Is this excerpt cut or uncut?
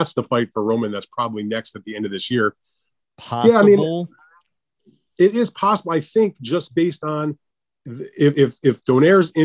cut